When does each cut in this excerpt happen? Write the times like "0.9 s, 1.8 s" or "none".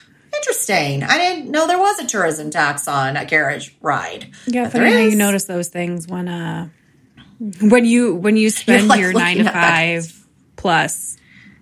none